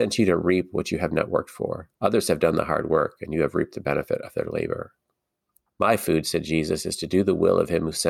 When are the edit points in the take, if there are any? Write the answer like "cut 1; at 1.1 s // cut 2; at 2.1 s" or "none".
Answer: cut 1; at 2.0 s // cut 2; at 5.7 s